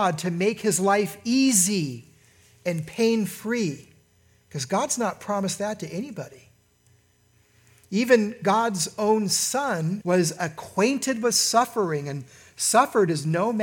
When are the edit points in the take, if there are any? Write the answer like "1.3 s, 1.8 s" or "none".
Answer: 10.0 s